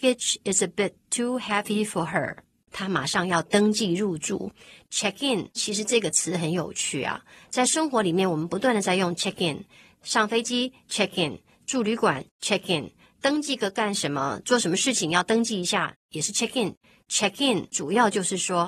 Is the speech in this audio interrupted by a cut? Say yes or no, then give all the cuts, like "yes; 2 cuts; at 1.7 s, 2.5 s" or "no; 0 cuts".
yes; 1 cut; at 2.7 s